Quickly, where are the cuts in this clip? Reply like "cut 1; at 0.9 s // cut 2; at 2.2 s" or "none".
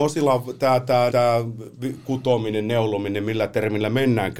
cut 1; at 1.1 s